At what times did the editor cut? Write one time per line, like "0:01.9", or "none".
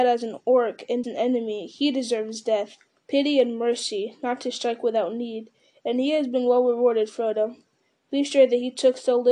0:01.0
0:02.9